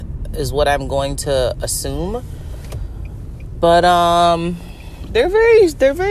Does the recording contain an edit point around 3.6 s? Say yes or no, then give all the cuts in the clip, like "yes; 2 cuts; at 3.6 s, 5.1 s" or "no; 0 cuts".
no; 0 cuts